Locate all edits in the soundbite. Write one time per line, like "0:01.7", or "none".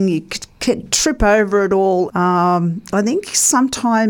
0:02.1

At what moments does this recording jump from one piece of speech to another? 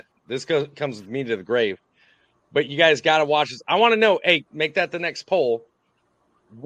0:04.5

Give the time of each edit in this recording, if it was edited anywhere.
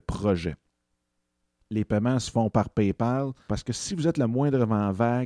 0:03.5

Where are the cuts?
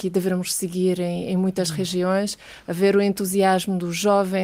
none

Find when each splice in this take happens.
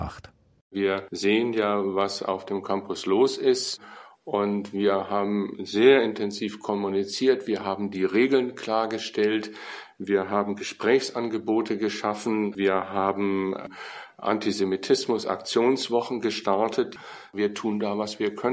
none

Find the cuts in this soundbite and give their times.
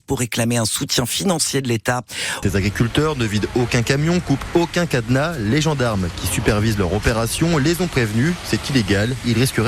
0:02.4

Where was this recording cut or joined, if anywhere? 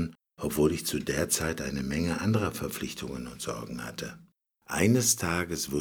0:04.5

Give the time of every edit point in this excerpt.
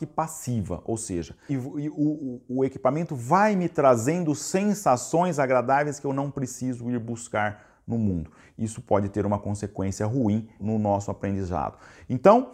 0:01.5
0:10.6

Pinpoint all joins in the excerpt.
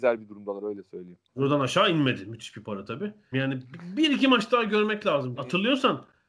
0:01.3
0:03.3
0:05.4

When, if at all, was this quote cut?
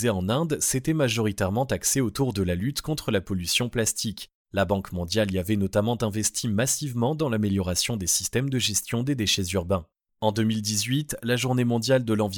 0:10.1

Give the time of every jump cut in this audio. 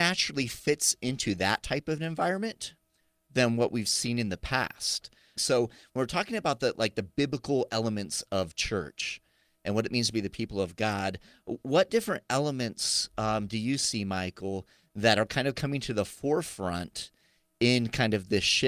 0:05.4

